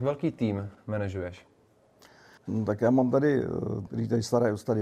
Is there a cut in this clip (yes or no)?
yes